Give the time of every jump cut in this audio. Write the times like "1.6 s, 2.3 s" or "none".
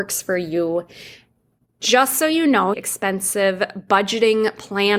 1.7 s, 2.7 s